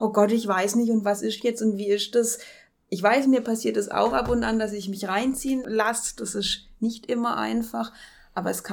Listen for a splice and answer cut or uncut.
uncut